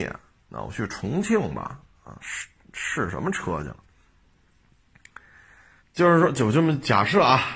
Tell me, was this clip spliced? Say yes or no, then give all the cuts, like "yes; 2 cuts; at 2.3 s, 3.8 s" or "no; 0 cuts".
yes; 1 cut; at 5.8 s